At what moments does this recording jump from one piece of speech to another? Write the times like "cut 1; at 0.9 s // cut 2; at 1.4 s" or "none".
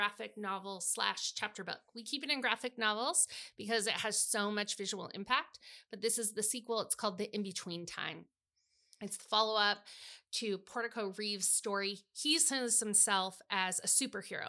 none